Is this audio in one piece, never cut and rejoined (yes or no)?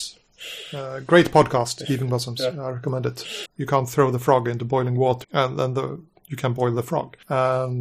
no